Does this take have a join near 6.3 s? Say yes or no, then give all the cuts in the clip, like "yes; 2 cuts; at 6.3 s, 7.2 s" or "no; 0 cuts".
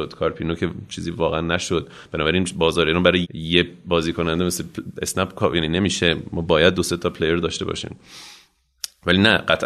no; 1 cut; at 3.2 s